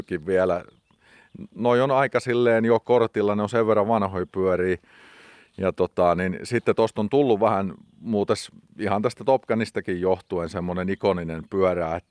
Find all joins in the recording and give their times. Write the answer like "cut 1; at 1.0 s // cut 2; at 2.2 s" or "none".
none